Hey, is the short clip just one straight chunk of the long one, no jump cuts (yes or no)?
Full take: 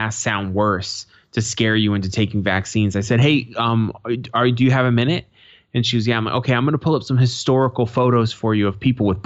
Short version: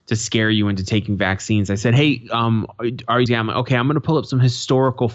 no